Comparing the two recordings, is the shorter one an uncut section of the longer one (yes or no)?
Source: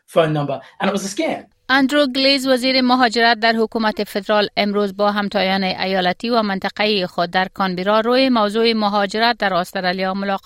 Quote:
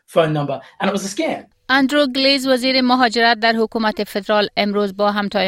yes